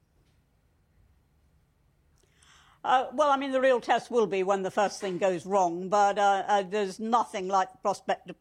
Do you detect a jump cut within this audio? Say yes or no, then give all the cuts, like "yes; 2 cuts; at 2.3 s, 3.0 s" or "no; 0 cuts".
no; 0 cuts